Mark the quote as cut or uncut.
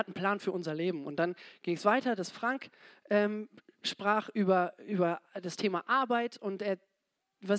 uncut